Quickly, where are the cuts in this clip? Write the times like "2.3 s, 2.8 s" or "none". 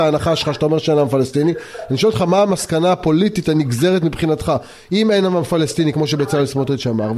none

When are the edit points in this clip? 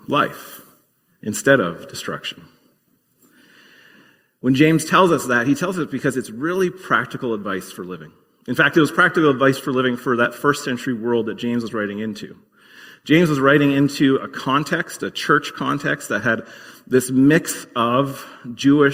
none

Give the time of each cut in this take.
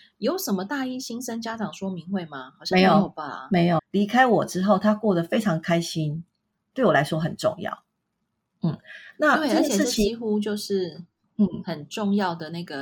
3.8 s

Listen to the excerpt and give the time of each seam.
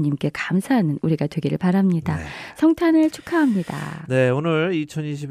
none

